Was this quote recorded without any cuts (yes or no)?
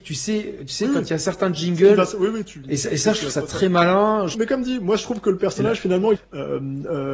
no